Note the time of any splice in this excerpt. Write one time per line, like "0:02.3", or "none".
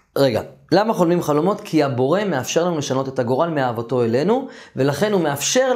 none

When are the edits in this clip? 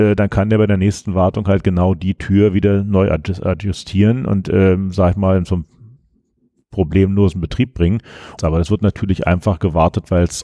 0:08.4

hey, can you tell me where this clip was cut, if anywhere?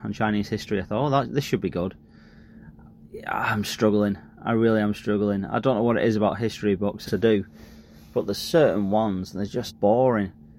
0:07.1
0:09.7

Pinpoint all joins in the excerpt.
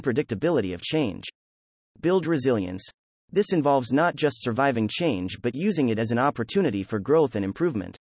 0:03.2

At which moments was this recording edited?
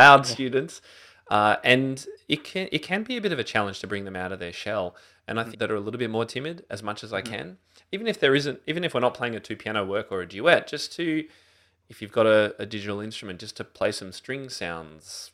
0:05.5

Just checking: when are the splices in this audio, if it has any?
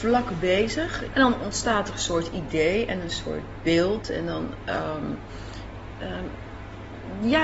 0:01.1

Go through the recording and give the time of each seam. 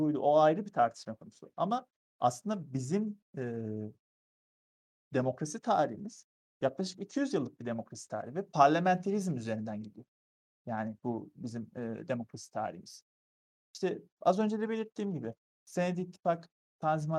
none

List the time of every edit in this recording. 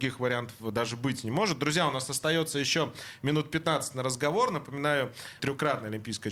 0:05.4

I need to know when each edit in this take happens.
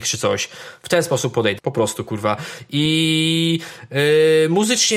0:01.6

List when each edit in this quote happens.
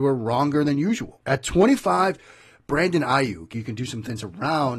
0:01.2
0:03.5

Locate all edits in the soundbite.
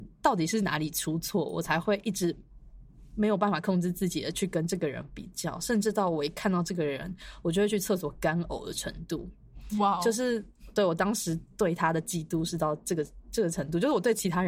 none

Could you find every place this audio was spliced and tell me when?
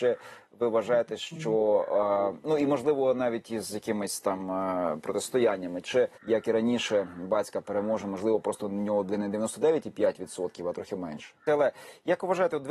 0:06.2
0:11.5

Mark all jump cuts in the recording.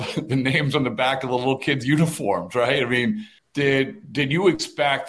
0:03.4

